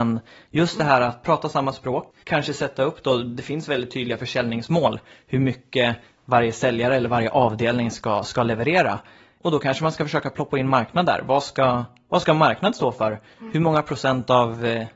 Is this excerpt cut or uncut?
uncut